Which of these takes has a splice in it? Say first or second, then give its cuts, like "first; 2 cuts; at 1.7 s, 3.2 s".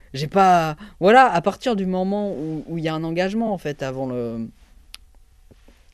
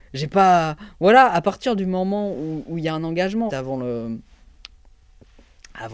second; 1 cut; at 3.5 s